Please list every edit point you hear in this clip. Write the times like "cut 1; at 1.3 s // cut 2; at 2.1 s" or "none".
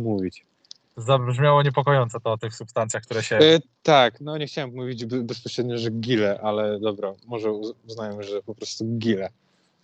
none